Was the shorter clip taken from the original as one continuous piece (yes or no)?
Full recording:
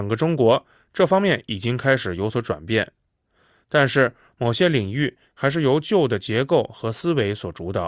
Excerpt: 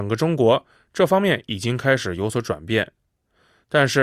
yes